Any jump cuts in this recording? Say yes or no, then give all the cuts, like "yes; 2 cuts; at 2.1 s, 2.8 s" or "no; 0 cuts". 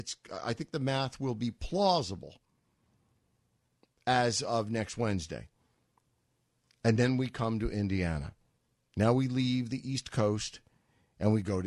no; 0 cuts